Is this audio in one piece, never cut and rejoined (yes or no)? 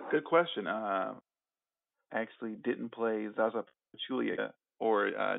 no